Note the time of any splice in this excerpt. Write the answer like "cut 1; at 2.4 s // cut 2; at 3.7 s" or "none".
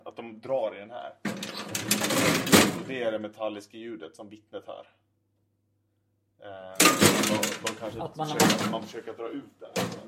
none